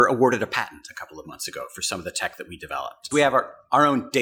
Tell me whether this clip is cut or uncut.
cut